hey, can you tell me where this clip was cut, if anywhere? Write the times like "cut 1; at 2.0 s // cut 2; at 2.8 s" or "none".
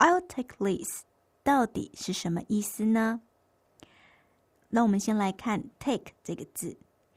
none